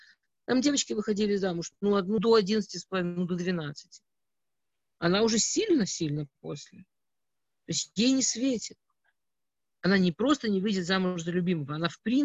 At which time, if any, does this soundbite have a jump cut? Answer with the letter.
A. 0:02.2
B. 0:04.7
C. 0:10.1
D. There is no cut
A